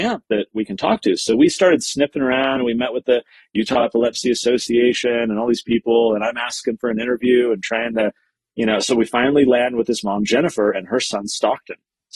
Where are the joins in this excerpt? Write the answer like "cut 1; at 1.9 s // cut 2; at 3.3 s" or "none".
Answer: none